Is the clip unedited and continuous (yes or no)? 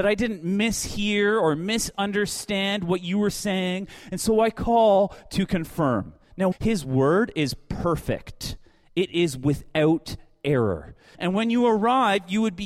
no